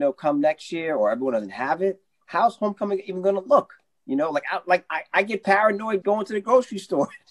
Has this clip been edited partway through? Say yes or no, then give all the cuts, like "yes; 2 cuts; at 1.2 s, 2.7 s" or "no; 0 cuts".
yes; 2 cuts; at 4.9 s, 6.0 s